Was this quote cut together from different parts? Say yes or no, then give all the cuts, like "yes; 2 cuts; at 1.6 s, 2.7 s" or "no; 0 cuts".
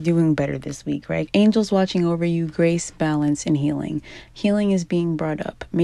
yes; 2 cuts; at 1.3 s, 4.3 s